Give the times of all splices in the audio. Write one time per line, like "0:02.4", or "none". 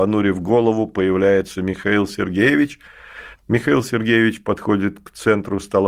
0:03.3